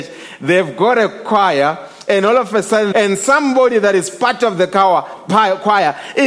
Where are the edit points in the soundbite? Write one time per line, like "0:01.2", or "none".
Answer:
0:02.9

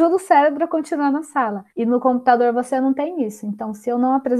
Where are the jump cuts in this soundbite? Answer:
0:01.7

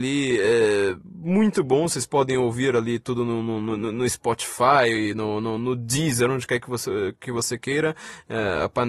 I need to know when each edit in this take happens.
none

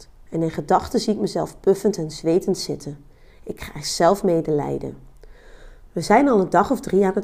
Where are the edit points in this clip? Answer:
0:05.9

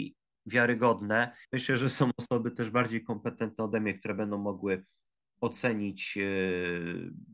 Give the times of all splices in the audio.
0:01.4

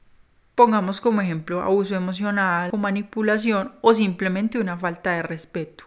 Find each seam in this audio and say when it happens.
0:02.7

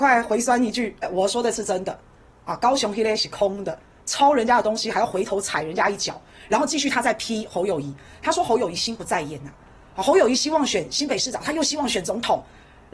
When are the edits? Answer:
0:01.0

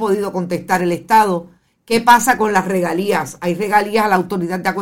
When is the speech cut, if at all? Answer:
none

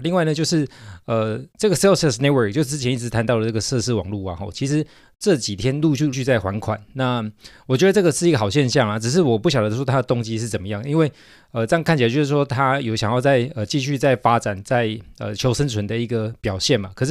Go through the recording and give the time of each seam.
0:06.1

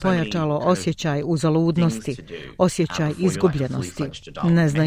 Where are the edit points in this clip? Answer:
none

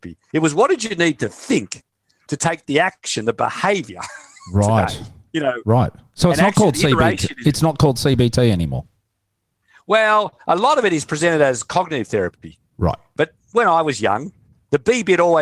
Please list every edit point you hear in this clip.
none

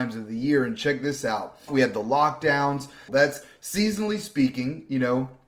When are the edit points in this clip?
0:01.7
0:03.1

